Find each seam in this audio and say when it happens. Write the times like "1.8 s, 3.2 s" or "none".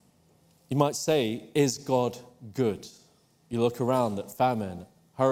none